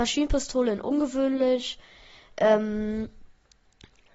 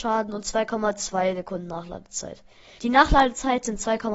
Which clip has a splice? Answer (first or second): second